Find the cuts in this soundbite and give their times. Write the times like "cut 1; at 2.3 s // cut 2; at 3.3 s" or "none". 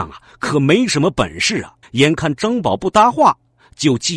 cut 1; at 1.8 s